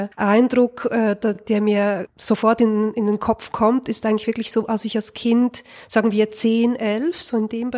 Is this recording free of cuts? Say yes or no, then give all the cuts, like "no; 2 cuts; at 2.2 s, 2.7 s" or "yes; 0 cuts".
yes; 0 cuts